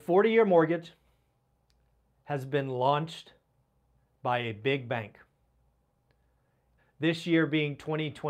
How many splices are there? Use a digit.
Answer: 1